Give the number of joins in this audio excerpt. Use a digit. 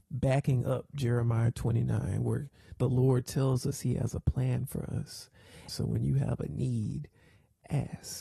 1